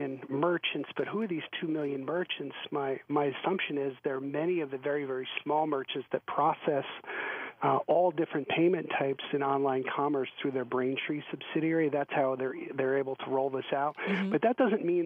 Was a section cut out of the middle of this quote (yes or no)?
no